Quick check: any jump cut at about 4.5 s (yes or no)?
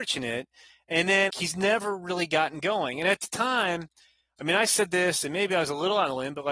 no